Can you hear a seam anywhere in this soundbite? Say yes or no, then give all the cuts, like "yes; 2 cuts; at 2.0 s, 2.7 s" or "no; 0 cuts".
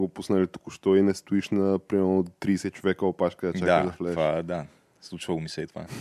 no; 0 cuts